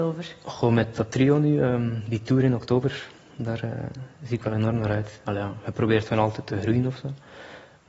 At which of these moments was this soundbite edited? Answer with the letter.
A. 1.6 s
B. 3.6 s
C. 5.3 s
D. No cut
C